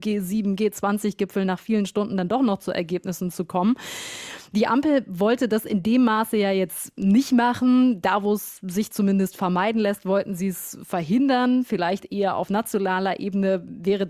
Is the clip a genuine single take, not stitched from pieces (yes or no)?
yes